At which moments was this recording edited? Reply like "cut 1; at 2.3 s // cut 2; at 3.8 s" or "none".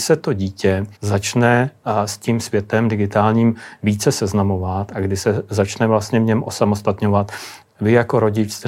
cut 1; at 1.0 s // cut 2; at 7.6 s